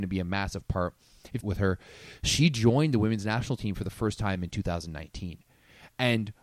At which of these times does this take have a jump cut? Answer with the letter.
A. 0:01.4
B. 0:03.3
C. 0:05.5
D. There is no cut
A